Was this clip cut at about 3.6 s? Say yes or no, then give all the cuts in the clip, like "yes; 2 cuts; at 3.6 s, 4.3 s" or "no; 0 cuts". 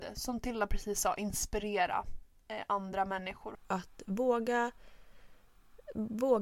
yes; 1 cut; at 3.6 s